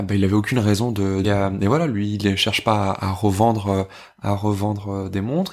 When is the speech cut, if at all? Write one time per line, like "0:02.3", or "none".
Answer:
0:01.2